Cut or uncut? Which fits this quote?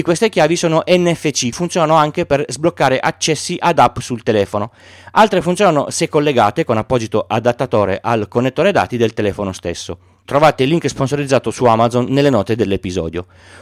cut